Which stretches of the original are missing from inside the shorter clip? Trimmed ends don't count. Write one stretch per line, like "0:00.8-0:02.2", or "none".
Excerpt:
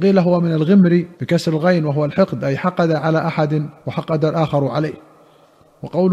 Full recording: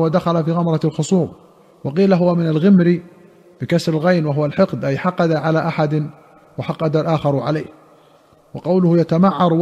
0:03.1-0:03.5
0:06.2-0:06.5